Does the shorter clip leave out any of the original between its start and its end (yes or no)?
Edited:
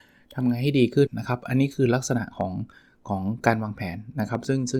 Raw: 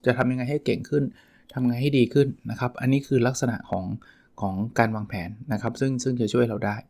yes